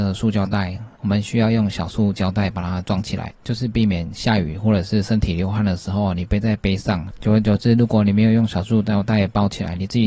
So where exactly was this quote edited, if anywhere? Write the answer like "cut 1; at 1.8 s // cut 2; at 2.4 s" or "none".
cut 1; at 1.0 s